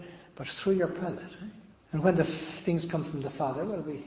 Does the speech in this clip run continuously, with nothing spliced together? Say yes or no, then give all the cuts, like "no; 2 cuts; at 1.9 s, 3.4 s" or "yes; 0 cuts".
no; 1 cut; at 1.7 s